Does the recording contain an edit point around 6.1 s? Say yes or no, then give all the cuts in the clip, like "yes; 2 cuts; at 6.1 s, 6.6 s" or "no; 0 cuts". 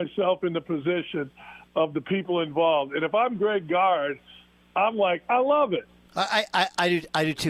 yes; 1 cut; at 6.1 s